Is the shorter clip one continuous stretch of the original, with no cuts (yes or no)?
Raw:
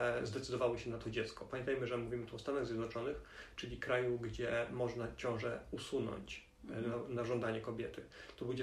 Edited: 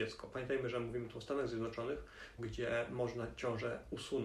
no